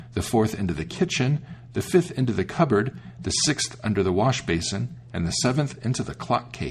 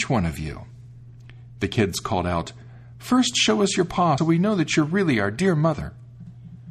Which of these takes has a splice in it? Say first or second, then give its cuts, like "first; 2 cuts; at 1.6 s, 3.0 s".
second; 1 cut; at 4.2 s